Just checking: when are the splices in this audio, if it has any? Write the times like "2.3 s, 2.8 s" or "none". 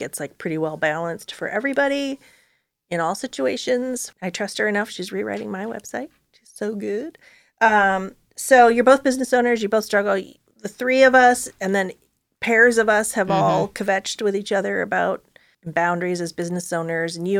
4.1 s